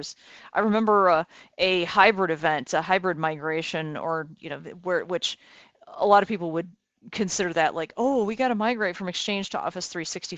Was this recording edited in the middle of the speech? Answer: no; 0 cuts

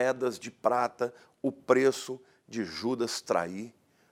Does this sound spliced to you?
no; 0 cuts

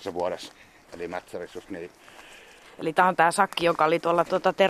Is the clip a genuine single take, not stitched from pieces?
yes; 0 cuts

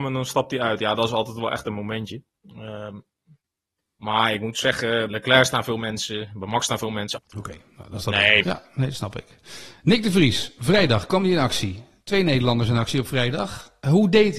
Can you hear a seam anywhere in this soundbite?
yes; 3 cuts; at 5.1 s, 7.2 s, 8.4 s

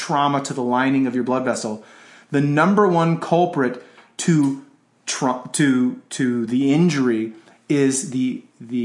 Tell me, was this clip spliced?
no; 0 cuts

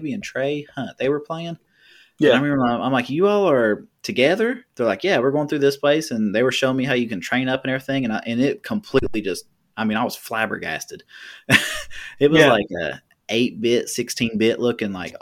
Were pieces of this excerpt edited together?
no; 0 cuts

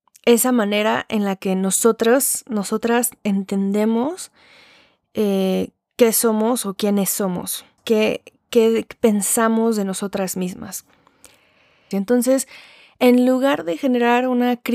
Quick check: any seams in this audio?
yes; 2 cuts; at 7.8 s, 11.9 s

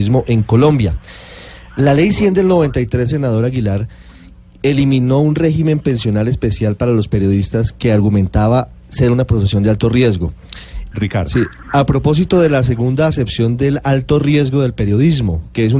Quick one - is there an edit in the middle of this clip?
yes; 1 cut; at 10.9 s

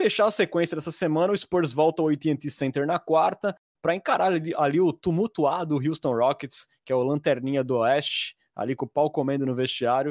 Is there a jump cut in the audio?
no; 0 cuts

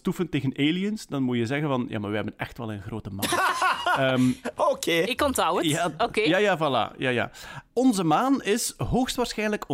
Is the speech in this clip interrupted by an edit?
no; 0 cuts

